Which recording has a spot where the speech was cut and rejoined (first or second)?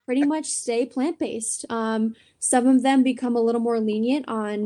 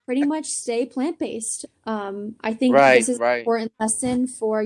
second